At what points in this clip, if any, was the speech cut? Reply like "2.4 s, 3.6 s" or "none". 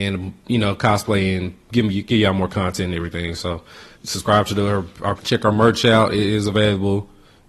3.9 s, 5.2 s

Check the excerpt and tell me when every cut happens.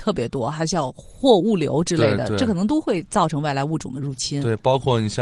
1.4 s

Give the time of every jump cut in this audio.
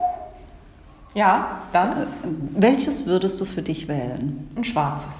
none

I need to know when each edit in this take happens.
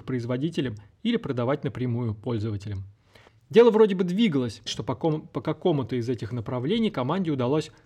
3.3 s, 4.7 s

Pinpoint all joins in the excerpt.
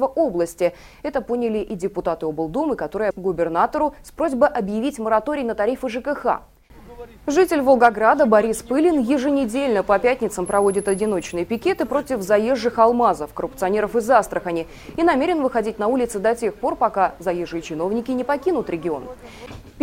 3.1 s

